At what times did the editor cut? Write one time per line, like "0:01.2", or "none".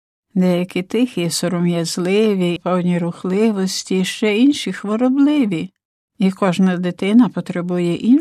0:02.6